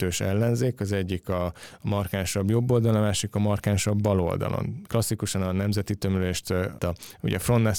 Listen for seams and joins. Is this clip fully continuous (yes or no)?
no